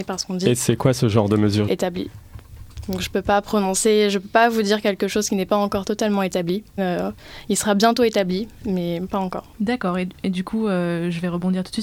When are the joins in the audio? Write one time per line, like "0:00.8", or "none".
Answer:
0:01.7
0:06.8
0:09.5